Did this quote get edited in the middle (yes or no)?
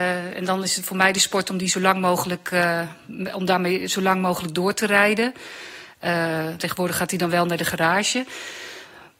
yes